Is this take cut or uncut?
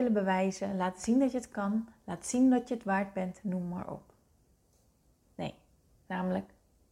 cut